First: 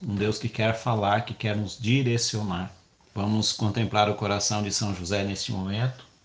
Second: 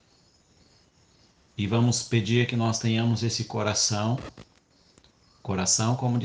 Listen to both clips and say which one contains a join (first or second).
first